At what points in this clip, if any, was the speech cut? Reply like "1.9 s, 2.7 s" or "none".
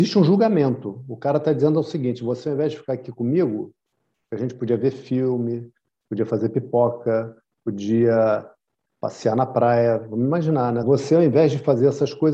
5.9 s, 10.8 s